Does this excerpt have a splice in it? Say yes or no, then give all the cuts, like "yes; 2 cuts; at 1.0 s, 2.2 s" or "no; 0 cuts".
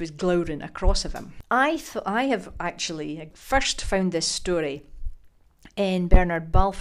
no; 0 cuts